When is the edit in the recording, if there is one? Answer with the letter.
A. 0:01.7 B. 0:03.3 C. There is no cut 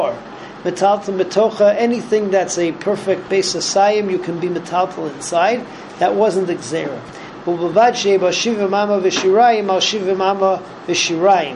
B